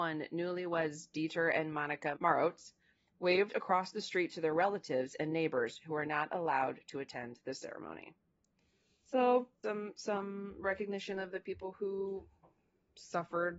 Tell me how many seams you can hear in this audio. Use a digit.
1